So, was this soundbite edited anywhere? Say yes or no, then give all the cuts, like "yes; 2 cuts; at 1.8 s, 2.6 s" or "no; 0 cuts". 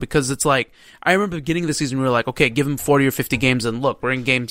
no; 0 cuts